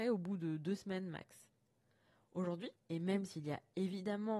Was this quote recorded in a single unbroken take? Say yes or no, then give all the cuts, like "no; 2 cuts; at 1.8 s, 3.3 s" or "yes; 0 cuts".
no; 1 cut; at 2.8 s